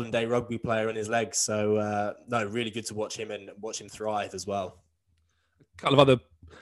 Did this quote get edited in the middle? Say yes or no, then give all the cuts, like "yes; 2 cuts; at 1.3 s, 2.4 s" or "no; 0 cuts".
no; 0 cuts